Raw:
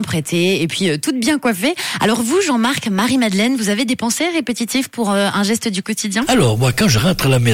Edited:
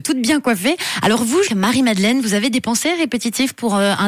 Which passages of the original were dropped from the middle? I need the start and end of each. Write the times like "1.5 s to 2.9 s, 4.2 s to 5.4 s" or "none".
2.5 s to 2.8 s

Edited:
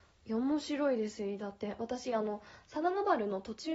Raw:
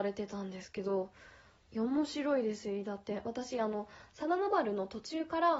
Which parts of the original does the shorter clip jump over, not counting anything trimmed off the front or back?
none

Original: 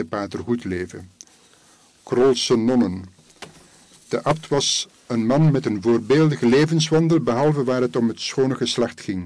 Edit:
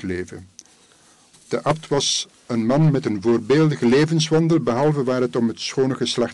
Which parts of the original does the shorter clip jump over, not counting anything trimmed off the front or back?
2.0 s to 3.9 s

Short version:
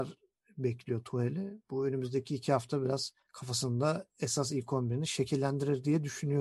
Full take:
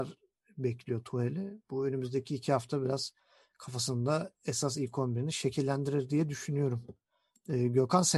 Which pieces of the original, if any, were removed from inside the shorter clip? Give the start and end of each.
3.2 s to 3.5 s

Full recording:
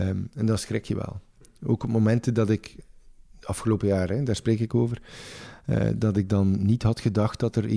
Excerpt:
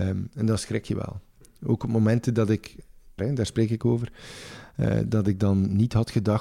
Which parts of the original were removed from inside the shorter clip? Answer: 3.2 s to 4.1 s

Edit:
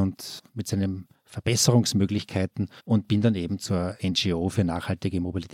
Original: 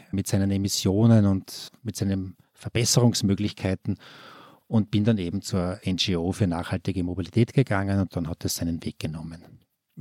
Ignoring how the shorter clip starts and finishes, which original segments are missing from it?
4.1 s to 4.6 s

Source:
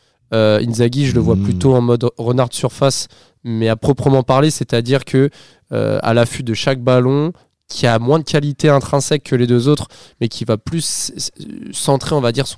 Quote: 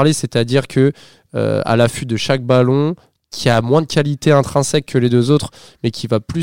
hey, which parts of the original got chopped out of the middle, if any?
none

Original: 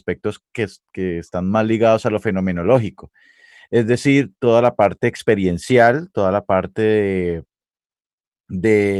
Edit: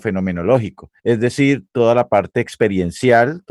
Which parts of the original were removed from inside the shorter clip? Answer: 3.2 s to 3.7 s

